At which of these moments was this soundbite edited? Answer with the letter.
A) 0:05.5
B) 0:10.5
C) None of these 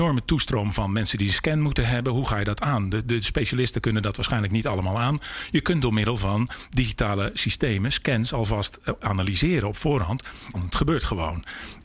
B